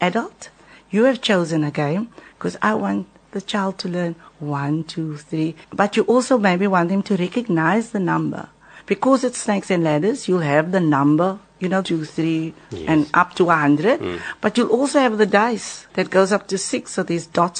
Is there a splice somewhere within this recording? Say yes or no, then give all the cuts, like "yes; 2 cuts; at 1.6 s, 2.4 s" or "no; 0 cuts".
yes; 3 cuts; at 5.6 s, 11.8 s, 15.9 s